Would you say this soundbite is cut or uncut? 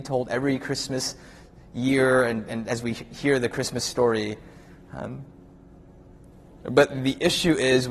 uncut